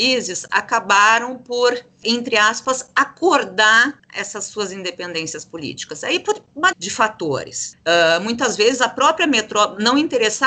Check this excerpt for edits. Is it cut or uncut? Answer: cut